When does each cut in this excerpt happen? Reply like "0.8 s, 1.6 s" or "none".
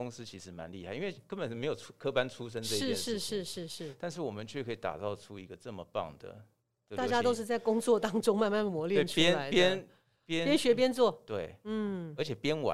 none

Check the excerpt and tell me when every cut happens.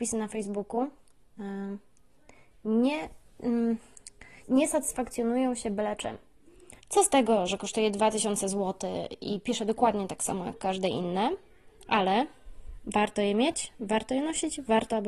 4.4 s, 6.8 s

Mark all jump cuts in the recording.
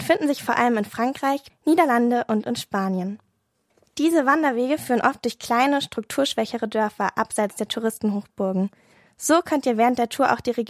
1.5 s

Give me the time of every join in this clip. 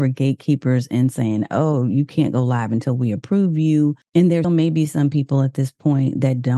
4.4 s

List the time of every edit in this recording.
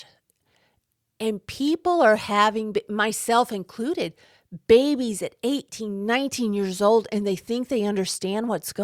none

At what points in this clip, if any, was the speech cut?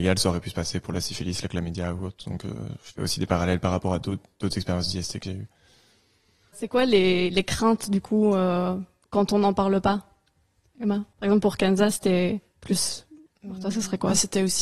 13.3 s

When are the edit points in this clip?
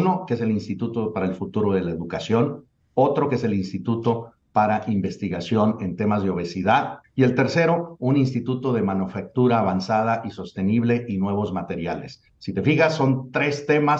7.0 s

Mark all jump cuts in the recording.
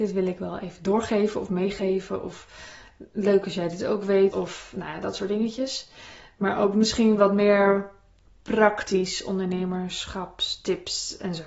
4.3 s

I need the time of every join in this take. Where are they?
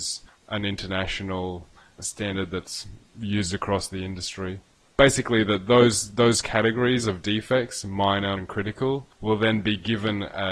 8.4 s

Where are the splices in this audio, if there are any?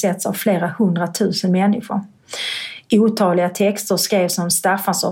none

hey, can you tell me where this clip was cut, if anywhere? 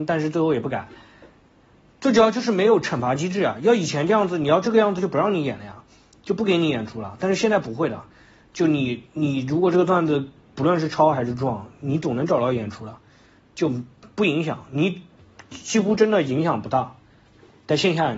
none

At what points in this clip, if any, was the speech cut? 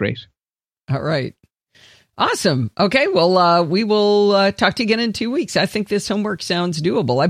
none

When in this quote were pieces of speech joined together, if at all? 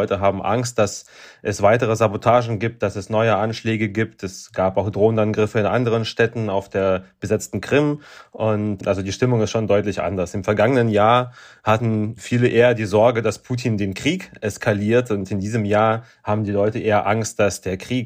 none

